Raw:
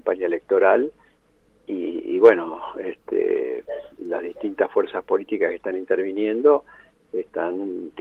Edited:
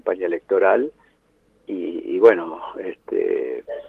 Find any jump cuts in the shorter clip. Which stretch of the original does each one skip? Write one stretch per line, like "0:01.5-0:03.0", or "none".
none